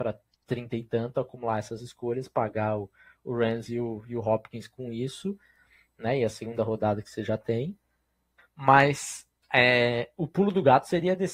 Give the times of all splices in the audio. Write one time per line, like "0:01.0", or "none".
0:08.4